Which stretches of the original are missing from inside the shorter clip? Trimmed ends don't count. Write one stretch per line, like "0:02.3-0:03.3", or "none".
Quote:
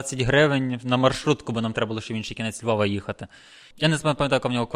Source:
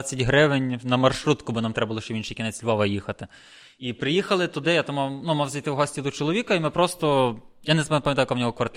0:03.7-0:07.6